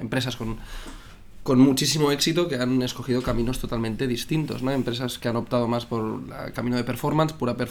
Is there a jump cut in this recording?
no; 0 cuts

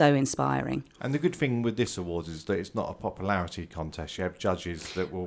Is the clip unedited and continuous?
no; 1 cut; at 4.2 s

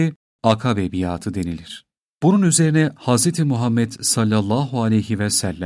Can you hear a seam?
no; 0 cuts

